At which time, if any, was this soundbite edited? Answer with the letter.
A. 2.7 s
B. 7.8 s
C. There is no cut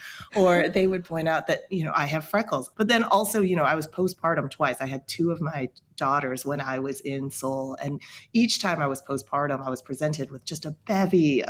A